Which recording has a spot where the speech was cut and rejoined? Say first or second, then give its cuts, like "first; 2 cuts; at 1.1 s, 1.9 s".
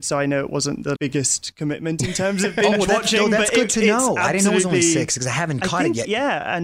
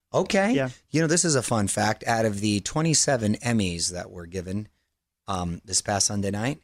first; 1 cut; at 1.0 s